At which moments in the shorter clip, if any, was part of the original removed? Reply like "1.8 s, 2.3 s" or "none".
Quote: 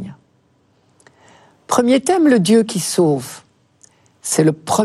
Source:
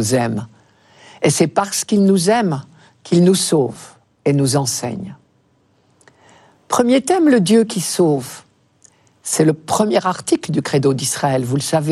none

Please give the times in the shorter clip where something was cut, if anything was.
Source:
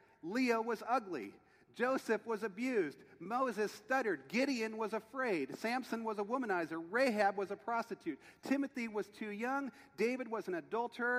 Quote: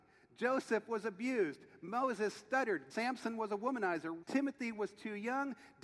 2.9 s, 4.2 s

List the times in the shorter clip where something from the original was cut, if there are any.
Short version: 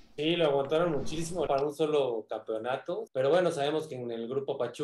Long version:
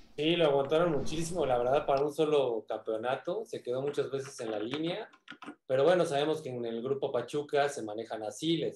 1.5 s, 3.1 s

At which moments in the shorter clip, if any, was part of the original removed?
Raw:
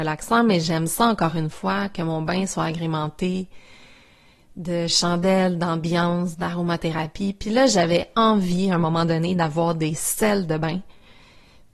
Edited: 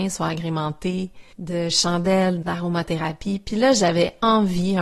1.3 s, 2.4 s

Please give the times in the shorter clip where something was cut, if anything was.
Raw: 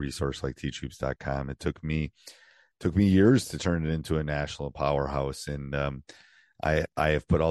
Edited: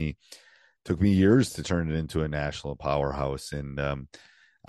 none

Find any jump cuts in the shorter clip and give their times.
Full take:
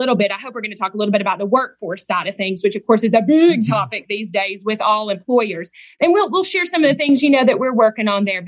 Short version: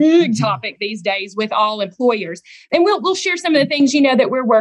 none

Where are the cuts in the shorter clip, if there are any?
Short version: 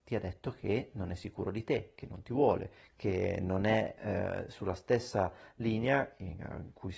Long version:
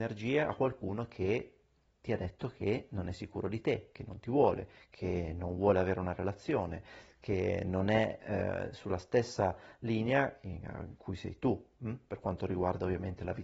2.9 s

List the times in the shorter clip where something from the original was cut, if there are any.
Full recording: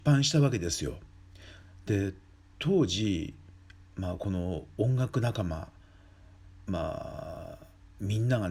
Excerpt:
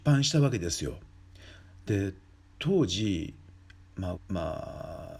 4.2 s

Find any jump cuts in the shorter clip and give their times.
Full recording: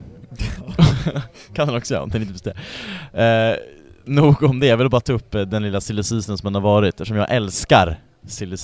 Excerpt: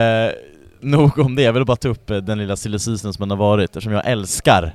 none

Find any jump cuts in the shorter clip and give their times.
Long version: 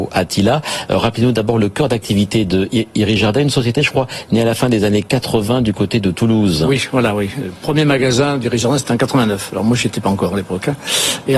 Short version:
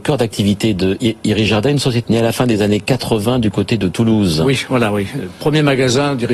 2.0 s

